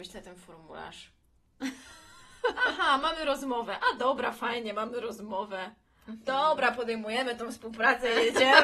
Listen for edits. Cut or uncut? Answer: uncut